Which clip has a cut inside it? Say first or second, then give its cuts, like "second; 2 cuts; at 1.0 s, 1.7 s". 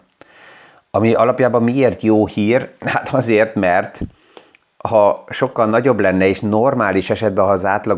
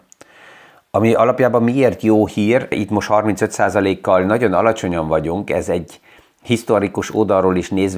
second; 1 cut; at 2.7 s